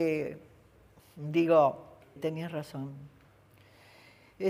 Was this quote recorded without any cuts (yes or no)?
no